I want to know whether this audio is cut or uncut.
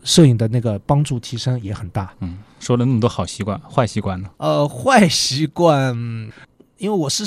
cut